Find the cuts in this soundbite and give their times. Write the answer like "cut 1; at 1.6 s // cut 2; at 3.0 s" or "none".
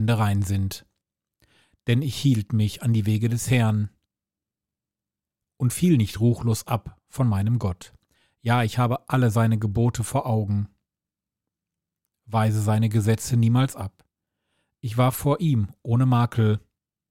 none